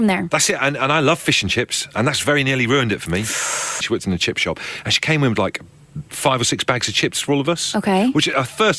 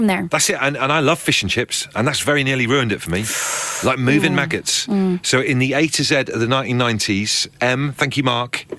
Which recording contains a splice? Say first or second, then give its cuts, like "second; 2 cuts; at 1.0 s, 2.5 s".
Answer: first; 1 cut; at 3.8 s